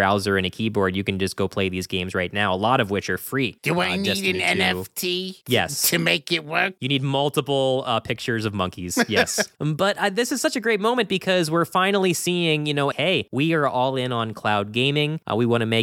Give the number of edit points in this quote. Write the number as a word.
two